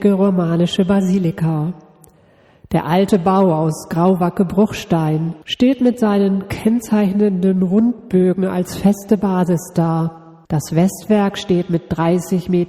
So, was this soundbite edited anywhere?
yes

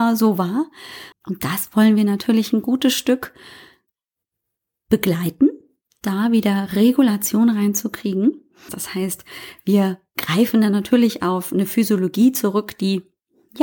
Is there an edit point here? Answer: yes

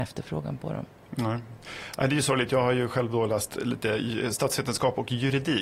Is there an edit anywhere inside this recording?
no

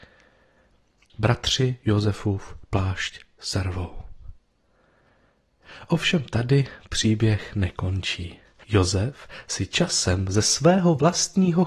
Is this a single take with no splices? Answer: yes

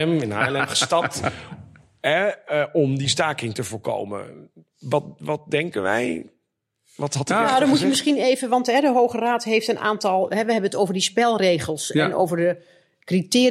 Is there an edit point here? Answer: no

